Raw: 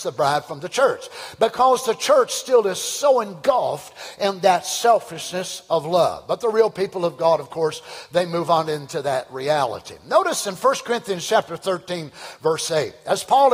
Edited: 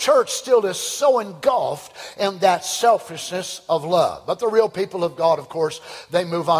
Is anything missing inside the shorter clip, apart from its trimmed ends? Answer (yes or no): no